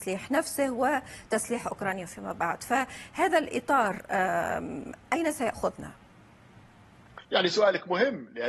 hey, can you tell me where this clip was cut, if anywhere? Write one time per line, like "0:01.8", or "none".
0:07.2